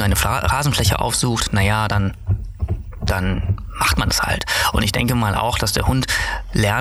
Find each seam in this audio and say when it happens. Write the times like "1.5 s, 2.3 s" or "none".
none